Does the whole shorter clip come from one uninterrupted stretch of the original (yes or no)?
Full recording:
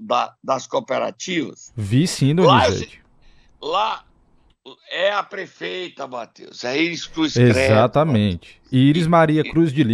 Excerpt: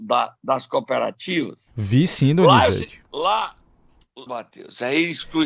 no